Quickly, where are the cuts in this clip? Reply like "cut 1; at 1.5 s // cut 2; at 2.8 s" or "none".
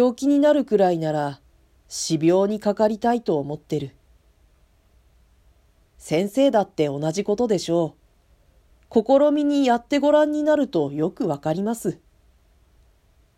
cut 1; at 5.8 s